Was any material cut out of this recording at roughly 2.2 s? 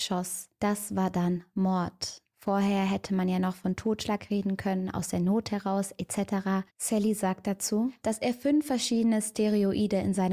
no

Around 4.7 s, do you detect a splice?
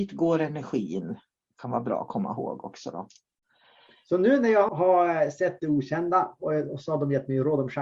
yes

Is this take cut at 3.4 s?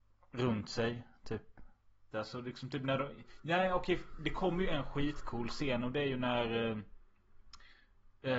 no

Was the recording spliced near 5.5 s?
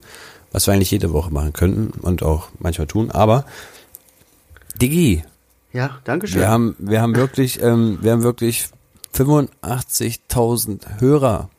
no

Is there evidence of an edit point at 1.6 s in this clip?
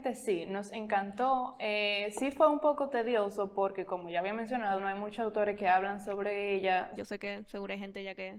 no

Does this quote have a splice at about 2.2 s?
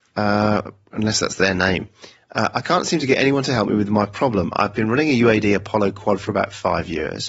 no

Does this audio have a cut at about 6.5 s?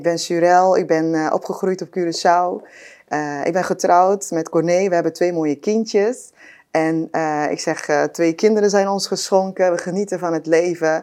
no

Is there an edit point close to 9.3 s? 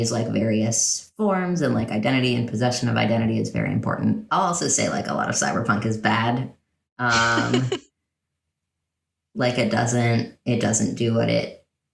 no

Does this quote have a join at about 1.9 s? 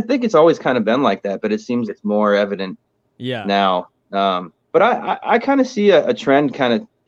yes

